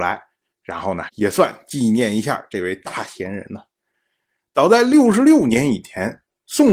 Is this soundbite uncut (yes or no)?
yes